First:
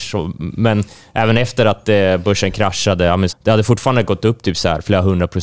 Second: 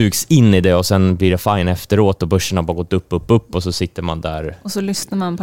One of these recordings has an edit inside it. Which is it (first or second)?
first